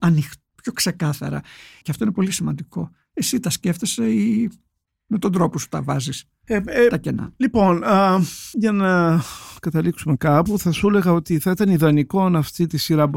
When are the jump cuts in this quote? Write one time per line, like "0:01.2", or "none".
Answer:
0:01.8